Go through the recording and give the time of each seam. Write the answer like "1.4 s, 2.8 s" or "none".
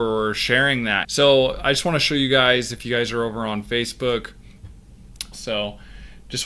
1.0 s, 5.3 s

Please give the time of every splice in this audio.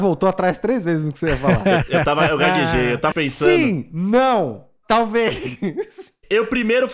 3.1 s

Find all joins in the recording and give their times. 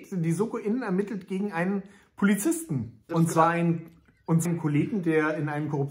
3.1 s, 4.4 s

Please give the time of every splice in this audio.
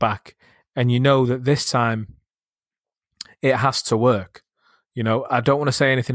none

